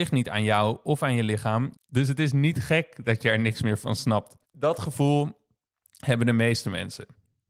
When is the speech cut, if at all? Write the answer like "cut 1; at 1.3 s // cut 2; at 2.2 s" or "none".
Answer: cut 1; at 1.7 s // cut 2; at 4.4 s